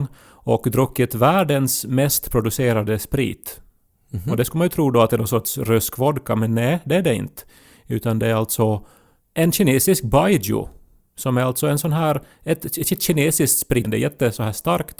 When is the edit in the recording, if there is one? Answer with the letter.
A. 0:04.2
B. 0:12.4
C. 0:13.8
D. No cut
C